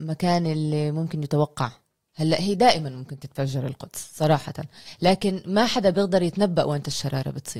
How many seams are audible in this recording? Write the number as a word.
zero